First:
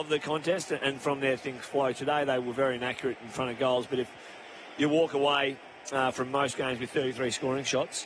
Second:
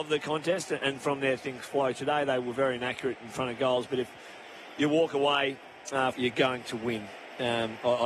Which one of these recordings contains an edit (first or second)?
second